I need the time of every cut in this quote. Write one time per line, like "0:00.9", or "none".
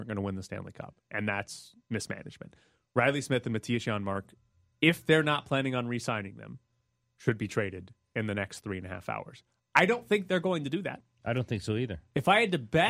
none